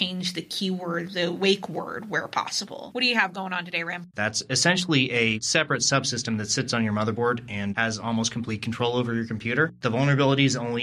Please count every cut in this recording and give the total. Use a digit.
1